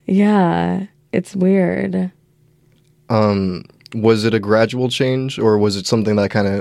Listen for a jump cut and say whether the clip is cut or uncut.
uncut